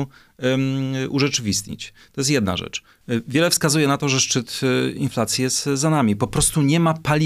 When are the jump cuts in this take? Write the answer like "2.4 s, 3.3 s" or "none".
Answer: none

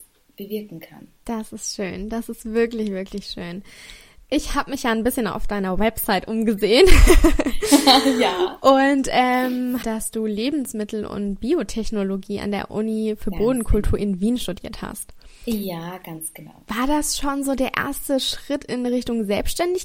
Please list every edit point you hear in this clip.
9.8 s

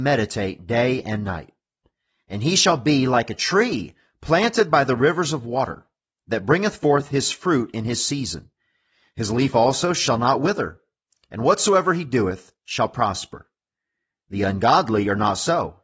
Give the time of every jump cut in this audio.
none

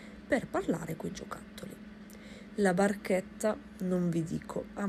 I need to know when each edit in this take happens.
2.5 s

